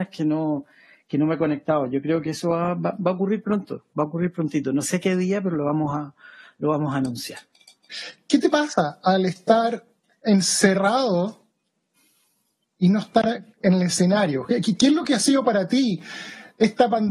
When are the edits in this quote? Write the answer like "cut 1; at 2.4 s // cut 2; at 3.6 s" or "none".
none